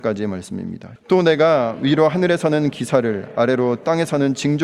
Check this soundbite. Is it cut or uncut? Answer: cut